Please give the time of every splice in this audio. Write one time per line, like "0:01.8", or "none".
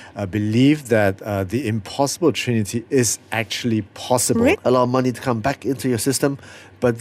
0:04.5